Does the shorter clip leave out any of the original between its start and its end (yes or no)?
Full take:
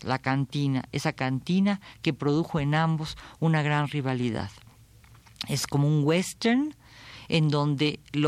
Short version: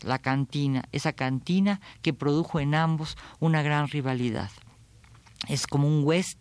no